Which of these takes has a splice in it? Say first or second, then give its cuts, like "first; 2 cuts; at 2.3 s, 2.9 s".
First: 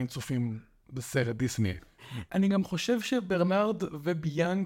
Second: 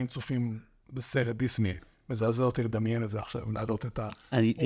first; 1 cut; at 2.0 s